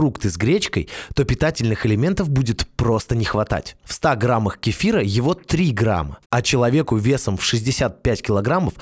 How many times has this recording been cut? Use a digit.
2